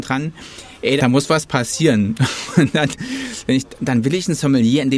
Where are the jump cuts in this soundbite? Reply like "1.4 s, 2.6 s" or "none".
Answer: 1.0 s